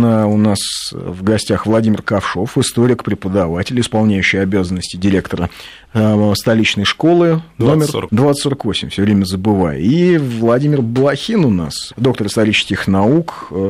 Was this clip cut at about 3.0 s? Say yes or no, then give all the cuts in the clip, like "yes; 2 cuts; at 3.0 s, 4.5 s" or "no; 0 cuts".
no; 2 cuts; at 8.1 s, 11.9 s